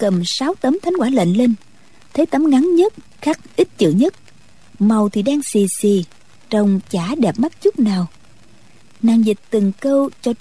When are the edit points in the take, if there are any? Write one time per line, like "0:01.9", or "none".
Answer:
none